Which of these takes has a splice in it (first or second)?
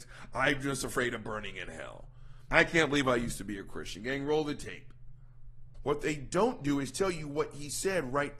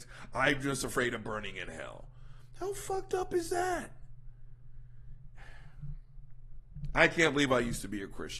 first